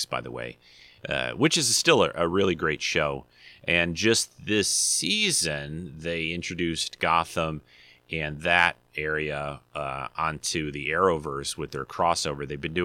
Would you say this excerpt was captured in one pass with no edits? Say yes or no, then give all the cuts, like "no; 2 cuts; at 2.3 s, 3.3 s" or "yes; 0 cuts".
yes; 0 cuts